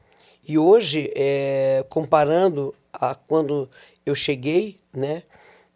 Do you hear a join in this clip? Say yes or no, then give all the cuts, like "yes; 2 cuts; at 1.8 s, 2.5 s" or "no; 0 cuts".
no; 0 cuts